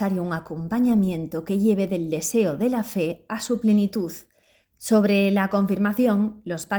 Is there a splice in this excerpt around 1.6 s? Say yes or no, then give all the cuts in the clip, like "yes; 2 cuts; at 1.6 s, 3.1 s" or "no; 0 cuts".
no; 1 cut; at 4.7 s